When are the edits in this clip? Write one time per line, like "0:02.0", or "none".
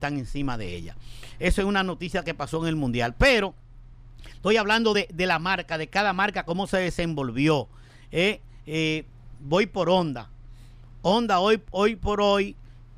none

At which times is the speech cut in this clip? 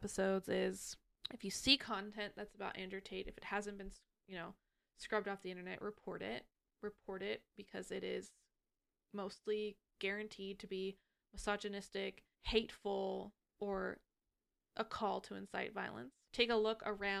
0:12.3

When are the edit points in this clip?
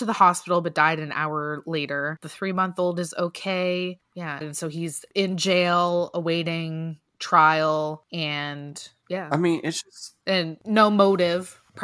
0:04.4

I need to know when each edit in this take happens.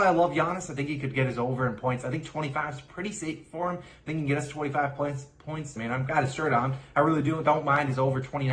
0:05.8

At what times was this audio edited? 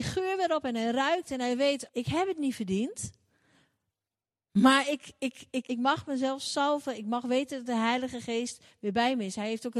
0:01.9
0:05.7

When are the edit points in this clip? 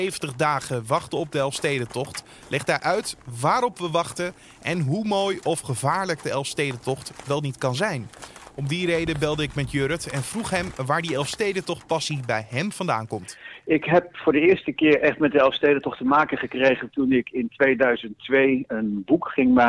none

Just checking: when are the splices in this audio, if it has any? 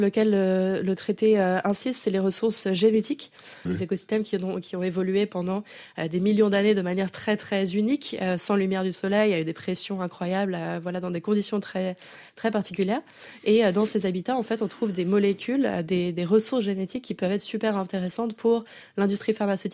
0:03.7

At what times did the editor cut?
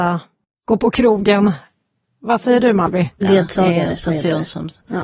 0:03.2

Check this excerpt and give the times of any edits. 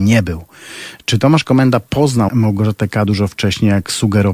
0:02.3

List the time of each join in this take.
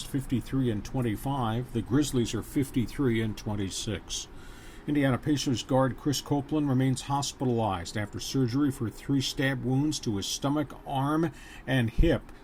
none

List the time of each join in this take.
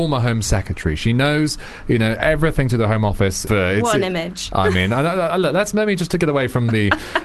0:03.5

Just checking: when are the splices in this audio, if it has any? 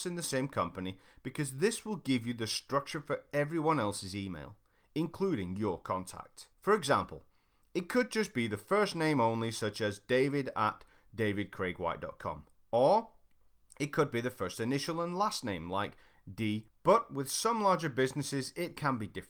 0:06.5
0:16.7

